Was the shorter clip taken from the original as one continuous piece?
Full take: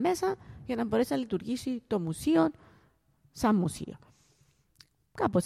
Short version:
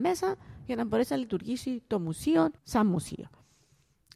no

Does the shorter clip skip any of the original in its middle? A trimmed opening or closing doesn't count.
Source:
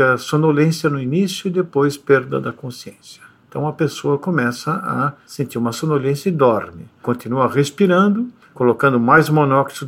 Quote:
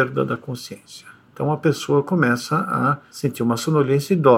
no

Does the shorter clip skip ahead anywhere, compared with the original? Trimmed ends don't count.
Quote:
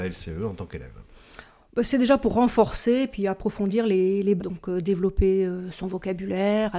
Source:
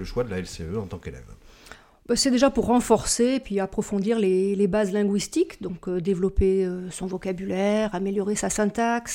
yes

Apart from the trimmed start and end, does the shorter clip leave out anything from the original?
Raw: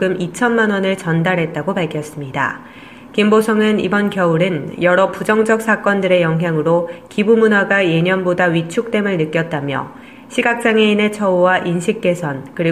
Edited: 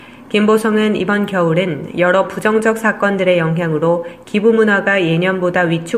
no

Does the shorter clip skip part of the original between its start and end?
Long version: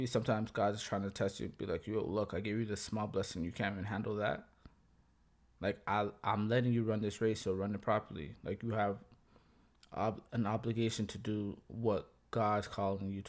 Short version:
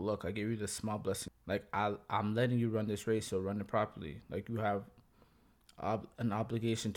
yes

